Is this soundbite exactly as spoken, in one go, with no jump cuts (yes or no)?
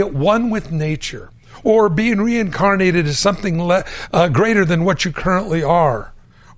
yes